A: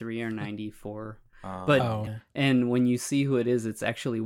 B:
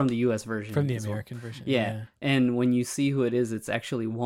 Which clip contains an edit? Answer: A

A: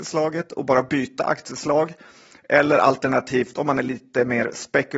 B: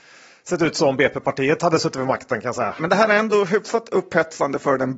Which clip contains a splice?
B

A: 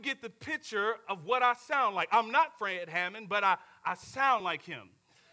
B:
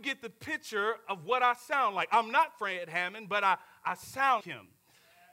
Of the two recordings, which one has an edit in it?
B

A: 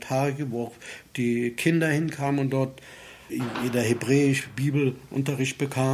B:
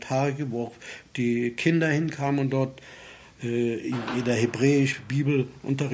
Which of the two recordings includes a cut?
A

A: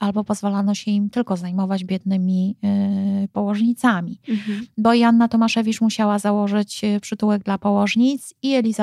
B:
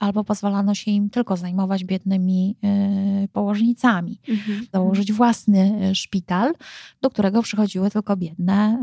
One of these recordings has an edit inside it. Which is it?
B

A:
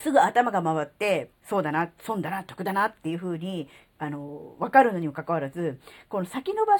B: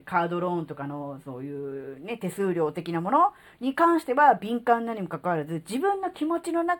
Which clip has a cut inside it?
A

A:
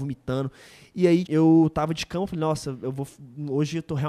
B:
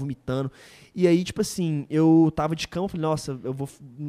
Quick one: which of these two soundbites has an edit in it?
A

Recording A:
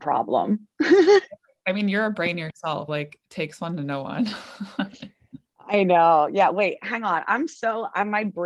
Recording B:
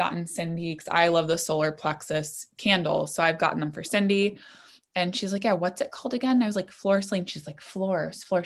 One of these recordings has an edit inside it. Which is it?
A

